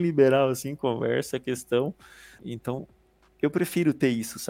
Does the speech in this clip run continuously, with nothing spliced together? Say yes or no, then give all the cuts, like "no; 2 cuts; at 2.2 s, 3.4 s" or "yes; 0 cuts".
no; 1 cut; at 2.4 s